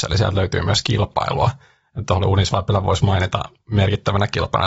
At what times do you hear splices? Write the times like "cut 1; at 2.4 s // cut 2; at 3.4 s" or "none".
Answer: none